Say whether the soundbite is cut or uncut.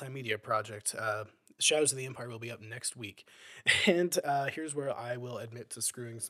uncut